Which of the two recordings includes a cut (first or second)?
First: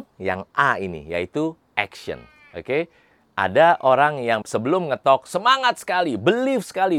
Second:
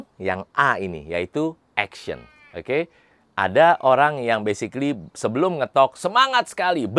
first